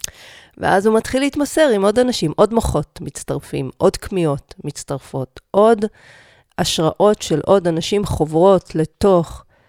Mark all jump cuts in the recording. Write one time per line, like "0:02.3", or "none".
none